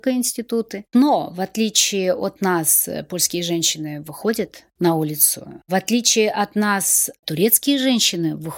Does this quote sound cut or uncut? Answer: uncut